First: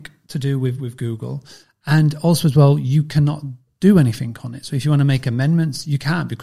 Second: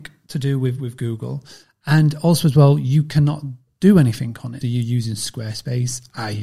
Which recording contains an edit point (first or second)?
second